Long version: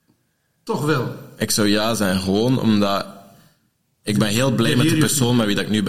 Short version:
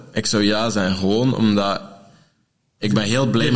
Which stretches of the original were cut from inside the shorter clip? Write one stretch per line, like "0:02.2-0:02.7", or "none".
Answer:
none